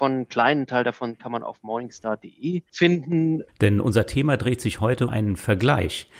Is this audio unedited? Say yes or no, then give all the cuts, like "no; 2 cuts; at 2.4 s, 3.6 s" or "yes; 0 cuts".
no; 2 cuts; at 3.5 s, 5.1 s